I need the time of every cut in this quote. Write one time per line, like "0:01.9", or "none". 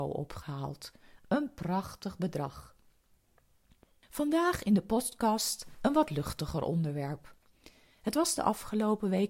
none